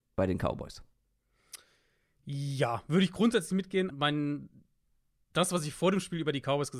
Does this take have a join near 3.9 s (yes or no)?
yes